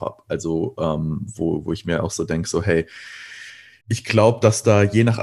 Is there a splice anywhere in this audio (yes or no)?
yes